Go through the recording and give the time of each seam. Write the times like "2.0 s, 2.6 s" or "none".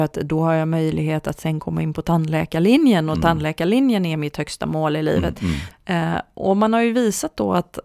5.7 s